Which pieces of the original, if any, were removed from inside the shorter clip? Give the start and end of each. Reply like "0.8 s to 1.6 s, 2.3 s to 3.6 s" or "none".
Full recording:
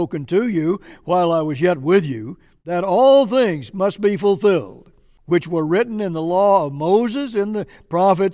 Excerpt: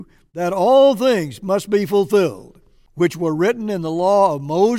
none